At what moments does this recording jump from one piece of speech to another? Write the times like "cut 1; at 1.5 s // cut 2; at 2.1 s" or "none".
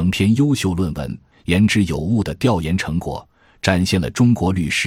cut 1; at 1.3 s